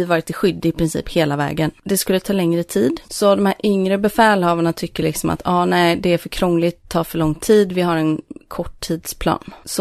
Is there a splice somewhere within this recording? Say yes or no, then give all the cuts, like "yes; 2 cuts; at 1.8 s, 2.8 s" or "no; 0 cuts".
no; 0 cuts